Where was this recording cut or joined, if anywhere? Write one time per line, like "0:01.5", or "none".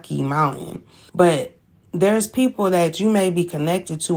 0:01.1